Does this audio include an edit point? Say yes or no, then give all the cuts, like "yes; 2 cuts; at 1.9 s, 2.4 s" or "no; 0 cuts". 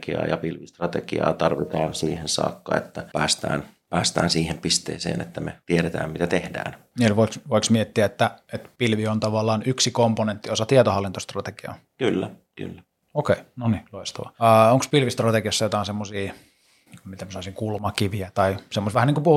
no; 0 cuts